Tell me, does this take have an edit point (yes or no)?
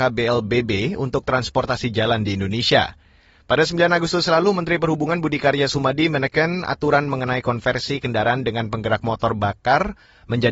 no